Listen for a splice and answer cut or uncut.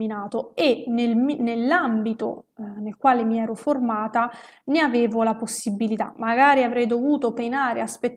uncut